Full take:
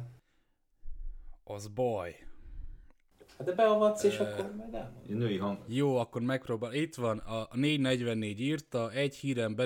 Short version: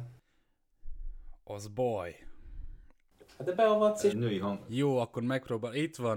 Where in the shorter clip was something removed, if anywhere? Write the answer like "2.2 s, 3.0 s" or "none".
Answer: 4.1 s

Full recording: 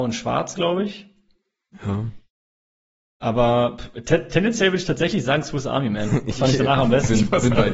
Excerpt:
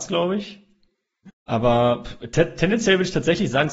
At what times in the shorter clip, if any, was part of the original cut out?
1.3 s

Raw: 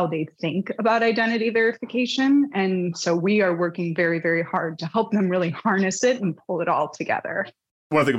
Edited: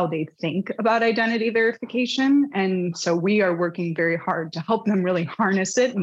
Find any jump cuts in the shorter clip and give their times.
4.0 s

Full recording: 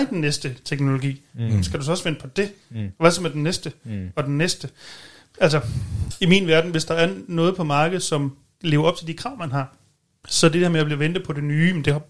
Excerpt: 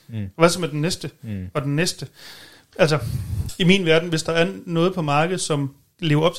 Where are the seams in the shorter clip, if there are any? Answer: none

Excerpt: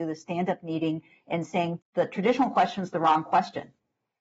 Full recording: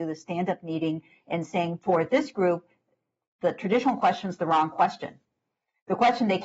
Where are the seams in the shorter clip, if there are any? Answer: 1.8 s

